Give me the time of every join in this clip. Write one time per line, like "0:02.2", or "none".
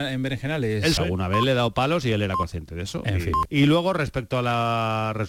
0:01.0
0:03.5